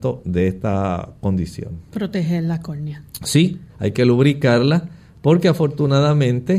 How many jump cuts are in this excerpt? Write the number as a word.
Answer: one